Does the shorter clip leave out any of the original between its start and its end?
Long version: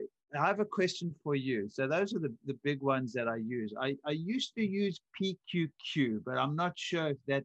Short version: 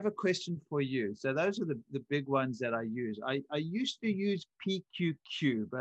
no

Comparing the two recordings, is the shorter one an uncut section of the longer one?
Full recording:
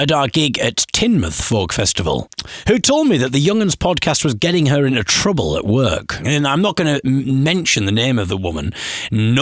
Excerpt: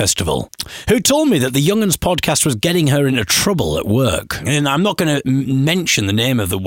yes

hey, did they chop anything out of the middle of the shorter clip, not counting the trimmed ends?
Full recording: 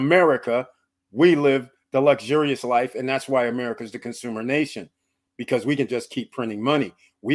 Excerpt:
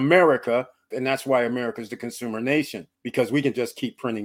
yes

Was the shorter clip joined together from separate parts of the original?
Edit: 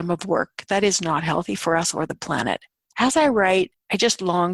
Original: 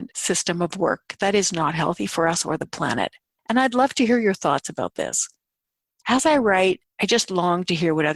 yes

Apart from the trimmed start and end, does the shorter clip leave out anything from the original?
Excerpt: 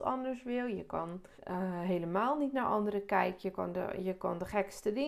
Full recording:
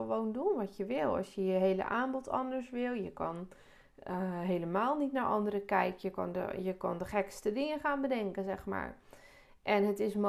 yes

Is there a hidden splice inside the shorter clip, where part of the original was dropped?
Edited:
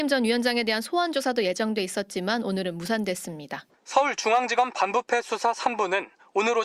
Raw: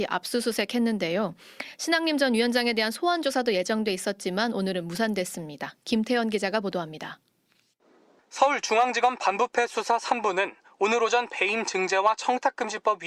yes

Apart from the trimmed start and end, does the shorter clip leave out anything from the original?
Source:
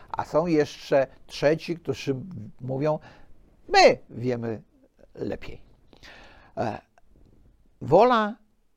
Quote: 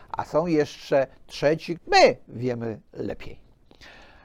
yes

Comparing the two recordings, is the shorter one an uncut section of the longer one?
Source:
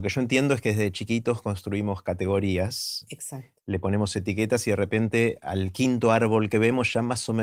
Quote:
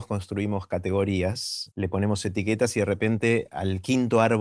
no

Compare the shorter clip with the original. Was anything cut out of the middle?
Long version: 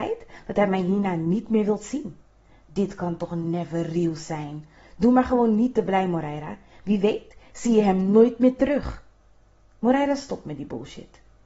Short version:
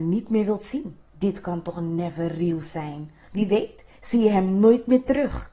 yes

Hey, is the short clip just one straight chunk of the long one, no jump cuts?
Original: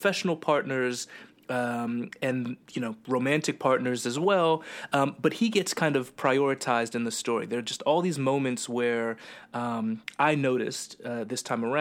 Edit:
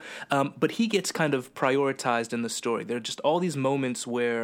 yes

